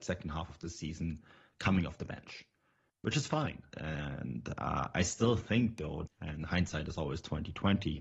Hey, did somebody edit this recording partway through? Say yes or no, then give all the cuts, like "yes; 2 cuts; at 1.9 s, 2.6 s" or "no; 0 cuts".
yes; 2 cuts; at 3.7 s, 6.1 s